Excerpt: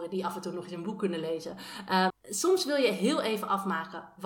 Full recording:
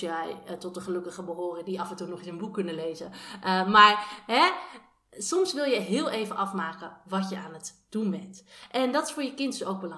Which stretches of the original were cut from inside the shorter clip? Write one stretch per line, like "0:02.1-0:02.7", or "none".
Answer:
0:03.6-0:05.0